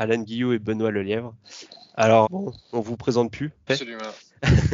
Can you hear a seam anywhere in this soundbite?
yes; 2 cuts; at 2.2 s, 3.7 s

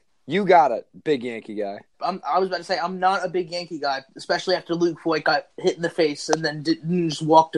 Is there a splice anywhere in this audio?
yes; 2 cuts; at 1.9 s, 4.1 s

